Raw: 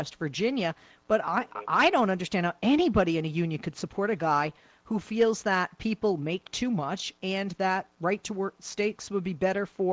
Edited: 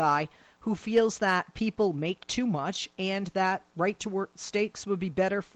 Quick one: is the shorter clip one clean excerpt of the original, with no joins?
yes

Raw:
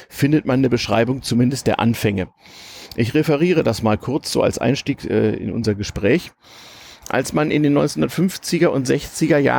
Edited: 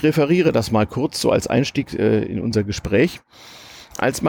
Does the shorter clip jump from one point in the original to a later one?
no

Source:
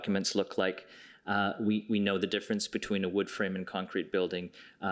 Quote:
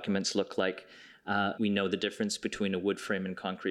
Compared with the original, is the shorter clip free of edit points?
no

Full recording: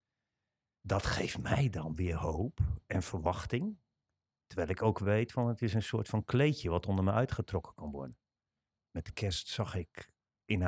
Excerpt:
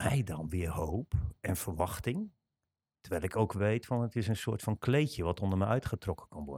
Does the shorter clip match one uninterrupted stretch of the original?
yes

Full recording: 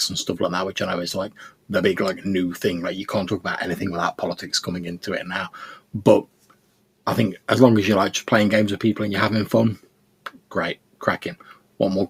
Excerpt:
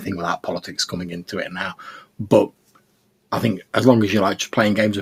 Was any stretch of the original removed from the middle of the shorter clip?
no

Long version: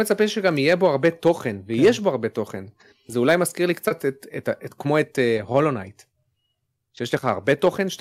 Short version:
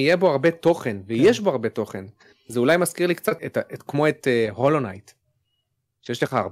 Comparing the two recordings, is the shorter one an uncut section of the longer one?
no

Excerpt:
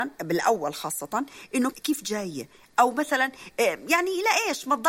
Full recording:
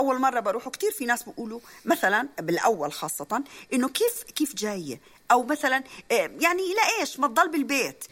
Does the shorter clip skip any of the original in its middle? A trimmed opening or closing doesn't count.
yes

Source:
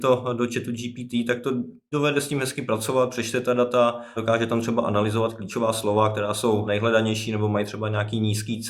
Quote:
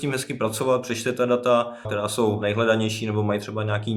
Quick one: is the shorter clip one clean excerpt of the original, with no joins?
no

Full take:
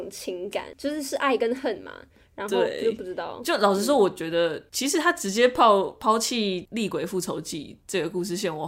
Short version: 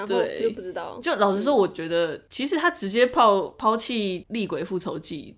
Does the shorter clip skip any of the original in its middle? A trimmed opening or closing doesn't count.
no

